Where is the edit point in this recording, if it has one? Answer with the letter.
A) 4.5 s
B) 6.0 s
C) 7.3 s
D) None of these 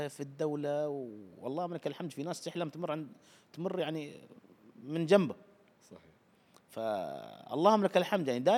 D